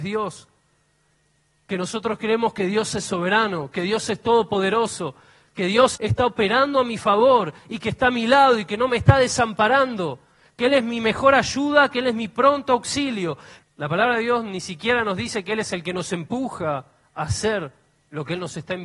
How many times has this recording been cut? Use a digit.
2